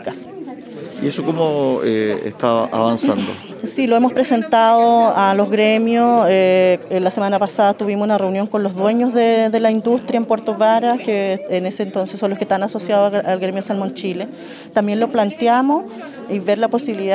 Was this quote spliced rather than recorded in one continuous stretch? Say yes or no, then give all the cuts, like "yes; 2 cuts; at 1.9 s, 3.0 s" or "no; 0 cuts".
no; 0 cuts